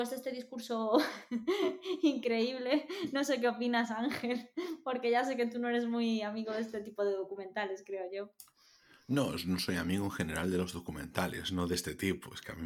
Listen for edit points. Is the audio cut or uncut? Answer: uncut